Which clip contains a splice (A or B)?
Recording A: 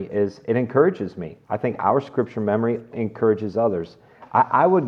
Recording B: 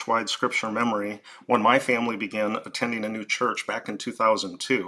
A